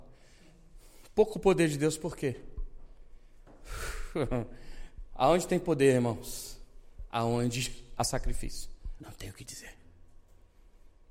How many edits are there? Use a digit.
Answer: 1